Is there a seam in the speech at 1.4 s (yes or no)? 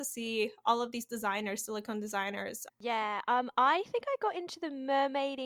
no